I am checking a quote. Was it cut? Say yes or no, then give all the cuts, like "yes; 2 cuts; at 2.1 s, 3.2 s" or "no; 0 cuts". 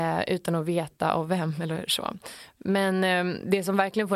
no; 0 cuts